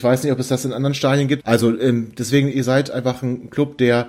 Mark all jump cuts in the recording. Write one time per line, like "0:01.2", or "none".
0:01.4
0:02.5